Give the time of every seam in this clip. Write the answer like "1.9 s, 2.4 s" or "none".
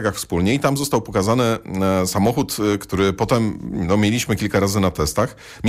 none

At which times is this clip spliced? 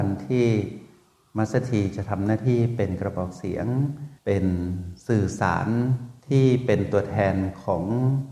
4.2 s

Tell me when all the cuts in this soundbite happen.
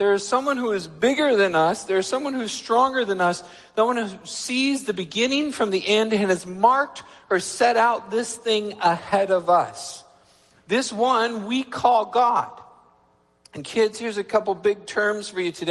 none

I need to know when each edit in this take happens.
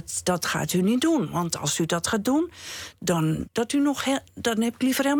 3.4 s

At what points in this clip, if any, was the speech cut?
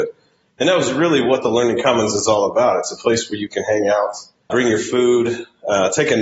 4.5 s

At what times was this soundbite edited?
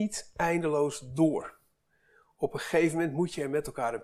none

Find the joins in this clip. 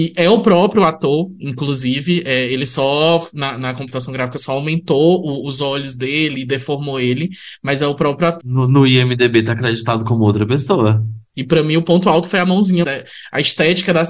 8.4 s, 11.3 s, 12.8 s

